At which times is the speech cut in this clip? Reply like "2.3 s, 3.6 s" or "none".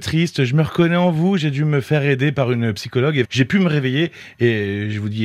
3.2 s